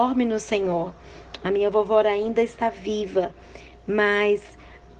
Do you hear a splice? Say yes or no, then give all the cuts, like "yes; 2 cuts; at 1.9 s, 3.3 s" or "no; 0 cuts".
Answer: no; 0 cuts